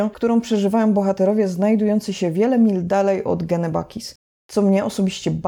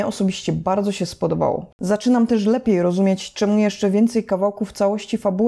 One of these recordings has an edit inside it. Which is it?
second; 1 cut; at 1.7 s

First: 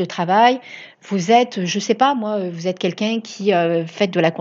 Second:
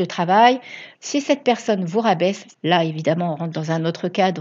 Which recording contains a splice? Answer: second; 2 cuts; at 0.9 s, 2.5 s

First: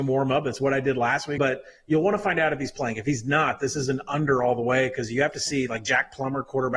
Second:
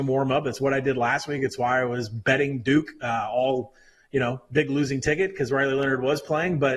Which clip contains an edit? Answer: first; 1 cut; at 1.4 s

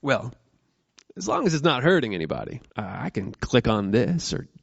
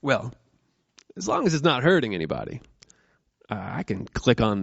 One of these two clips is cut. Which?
first; 1 cut; at 2.7 s

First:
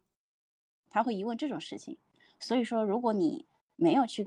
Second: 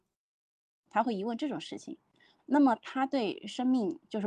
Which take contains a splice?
second; 1 cut; at 2.4 s

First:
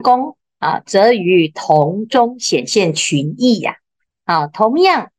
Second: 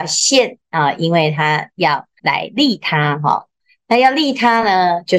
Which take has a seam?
second; 1 cut; at 2.2 s

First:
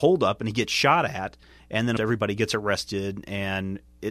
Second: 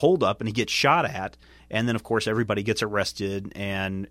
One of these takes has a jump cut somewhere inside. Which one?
first; 1 cut; at 2.0 s

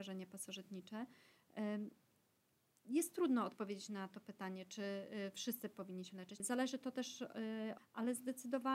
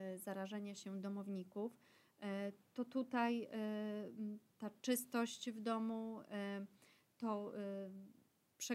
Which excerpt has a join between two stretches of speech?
first; 2 cuts; at 6.4 s, 7.8 s

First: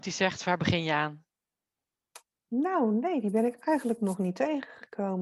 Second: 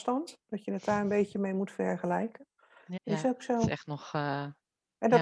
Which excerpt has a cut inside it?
second; 1 cut; at 3.0 s

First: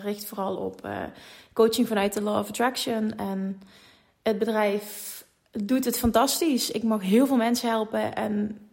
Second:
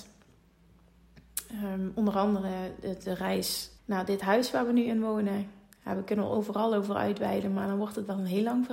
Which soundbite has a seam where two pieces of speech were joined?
second; 1 cut; at 3.8 s

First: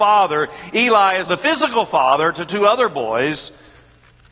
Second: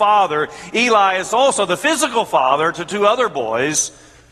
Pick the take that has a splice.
first; 1 cut; at 1.3 s

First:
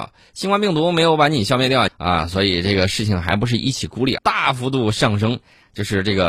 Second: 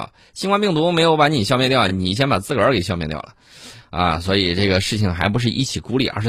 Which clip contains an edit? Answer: first; 2 cuts; at 1.9 s, 4.2 s

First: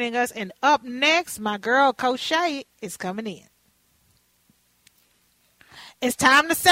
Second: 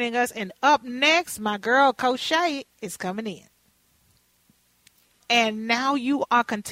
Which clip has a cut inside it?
second; 1 cut; at 5.2 s

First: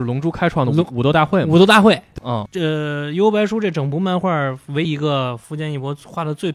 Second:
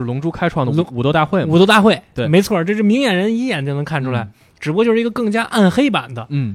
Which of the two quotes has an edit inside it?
first; 2 cuts; at 2.2 s, 4.9 s

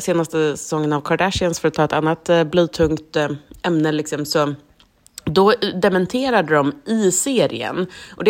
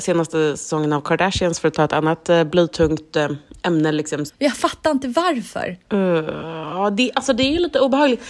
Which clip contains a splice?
second; 1 cut; at 4.3 s

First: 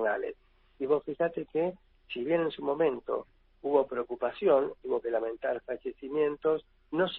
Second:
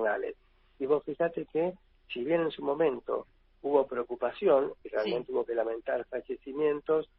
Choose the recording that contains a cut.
first; 1 cut; at 4.8 s

